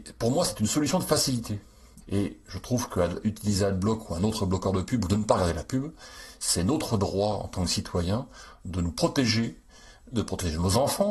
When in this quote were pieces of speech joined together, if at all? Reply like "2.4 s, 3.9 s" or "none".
2.0 s, 10.1 s